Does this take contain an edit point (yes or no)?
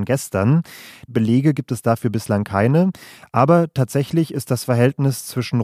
yes